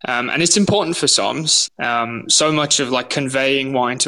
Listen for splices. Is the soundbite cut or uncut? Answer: cut